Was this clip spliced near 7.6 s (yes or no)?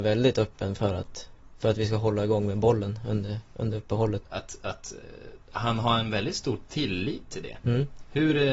no